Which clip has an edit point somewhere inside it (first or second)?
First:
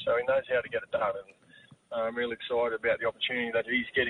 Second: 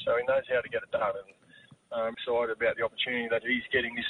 second